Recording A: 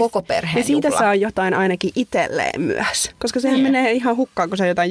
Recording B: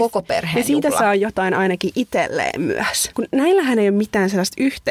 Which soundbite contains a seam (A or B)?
B